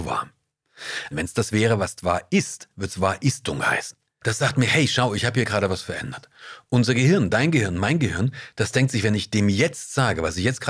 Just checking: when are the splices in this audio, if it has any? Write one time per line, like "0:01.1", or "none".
0:01.1
0:04.2

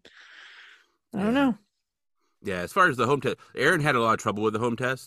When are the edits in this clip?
none

